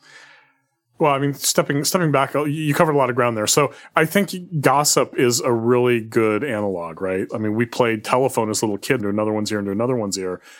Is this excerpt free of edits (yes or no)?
no